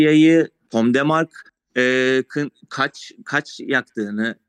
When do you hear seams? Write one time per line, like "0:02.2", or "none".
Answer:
none

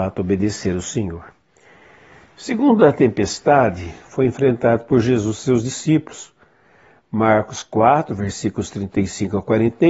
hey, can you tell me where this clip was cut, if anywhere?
none

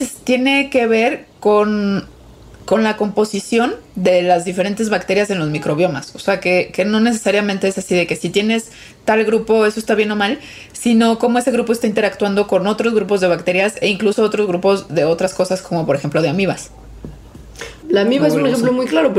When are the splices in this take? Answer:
0:17.8

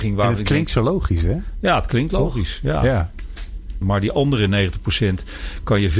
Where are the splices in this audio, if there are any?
0:03.8

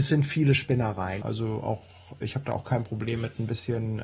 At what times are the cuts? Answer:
0:01.2

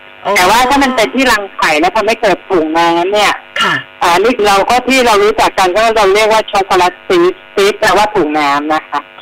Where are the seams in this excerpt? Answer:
0:04.4

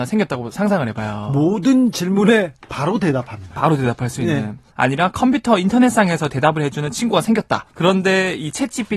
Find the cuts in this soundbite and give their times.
0:04.7
0:07.7

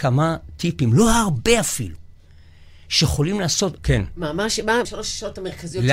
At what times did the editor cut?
0:03.8
0:04.8

